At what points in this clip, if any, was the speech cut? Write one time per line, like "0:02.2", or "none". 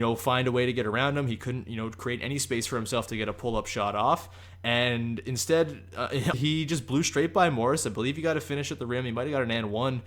0:06.3